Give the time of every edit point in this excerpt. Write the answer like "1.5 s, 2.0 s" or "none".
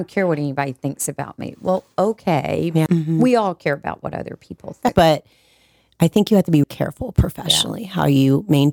2.9 s, 4.9 s, 6.6 s